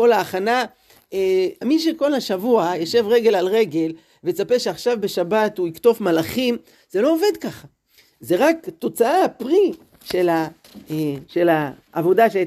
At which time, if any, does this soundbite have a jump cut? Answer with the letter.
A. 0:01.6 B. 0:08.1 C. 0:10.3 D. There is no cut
A